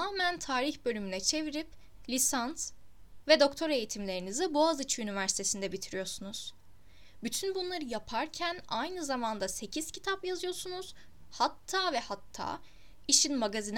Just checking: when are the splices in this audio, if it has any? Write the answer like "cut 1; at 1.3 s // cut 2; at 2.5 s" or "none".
cut 1; at 11.3 s